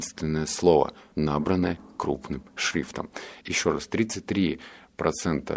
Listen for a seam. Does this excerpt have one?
yes; 2 cuts; at 1.1 s, 3.4 s

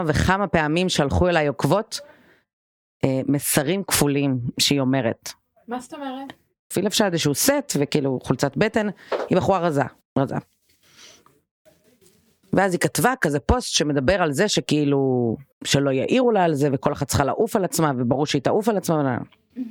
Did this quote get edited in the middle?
yes; 3 cuts; at 6.7 s, 10.0 s, 15.5 s

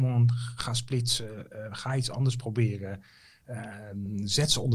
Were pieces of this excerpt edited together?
no; 0 cuts

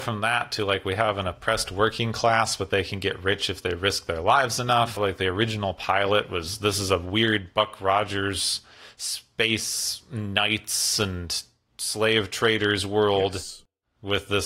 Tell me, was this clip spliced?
yes; 1 cut; at 5.0 s

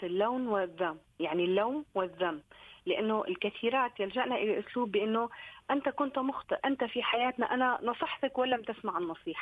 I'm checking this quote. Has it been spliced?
yes; 1 cut; at 6.6 s

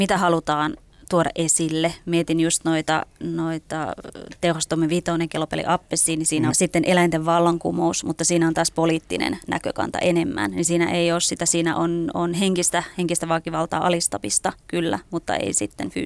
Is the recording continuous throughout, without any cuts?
no; 1 cut; at 6.5 s

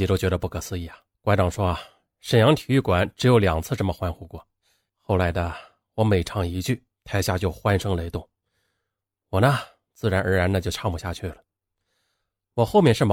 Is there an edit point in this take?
yes; 2 cuts; at 1.1 s, 4.9 s

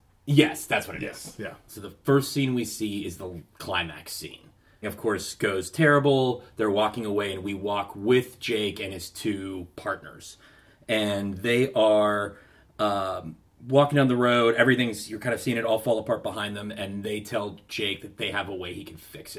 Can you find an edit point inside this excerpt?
yes; 2 cuts; at 1.7 s, 4.8 s

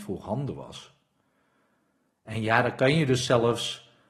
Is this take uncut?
yes; 0 cuts

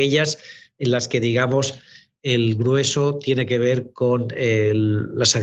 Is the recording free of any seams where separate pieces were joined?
yes; 0 cuts

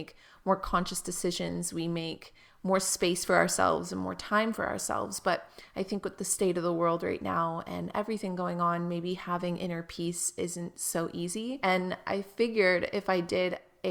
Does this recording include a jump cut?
no; 0 cuts

